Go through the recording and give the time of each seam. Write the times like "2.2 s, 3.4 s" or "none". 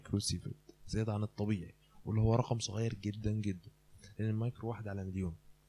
3.2 s

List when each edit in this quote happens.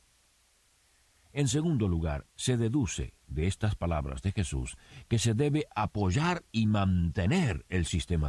2.3 s

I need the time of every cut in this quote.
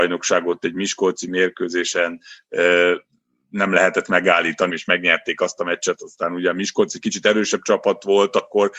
4.7 s

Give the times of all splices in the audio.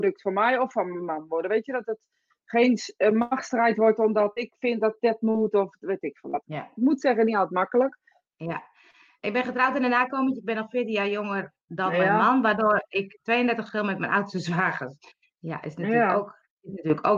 6.4 s, 8.3 s

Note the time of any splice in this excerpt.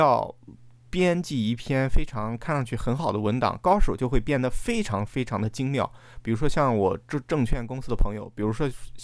none

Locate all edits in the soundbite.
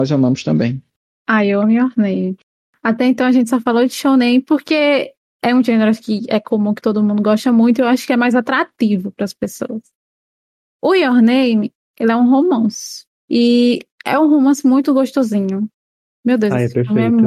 16.1 s

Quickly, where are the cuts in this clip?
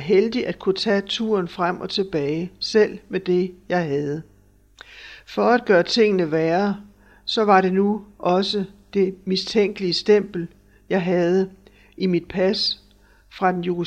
none

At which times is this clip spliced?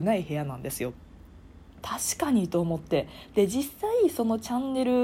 1.8 s

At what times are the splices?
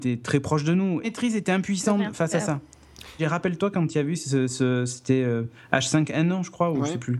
1.0 s, 3.2 s

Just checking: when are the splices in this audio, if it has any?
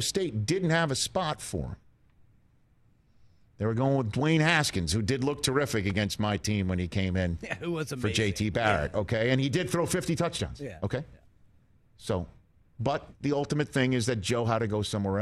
none

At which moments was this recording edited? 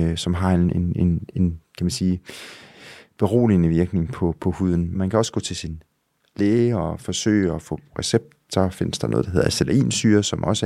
4.9 s

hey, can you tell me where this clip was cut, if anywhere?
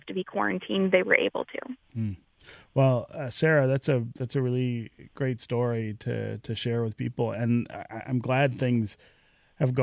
none

